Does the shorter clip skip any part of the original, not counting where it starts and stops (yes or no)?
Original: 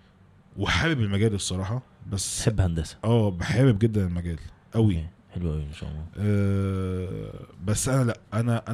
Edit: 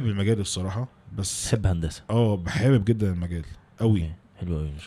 no